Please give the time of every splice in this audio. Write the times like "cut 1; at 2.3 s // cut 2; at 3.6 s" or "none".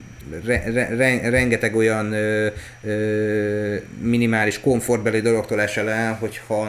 none